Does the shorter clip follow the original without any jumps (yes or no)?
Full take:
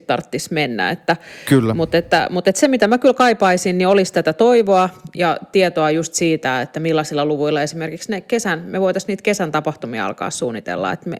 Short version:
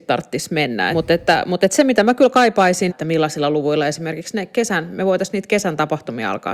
no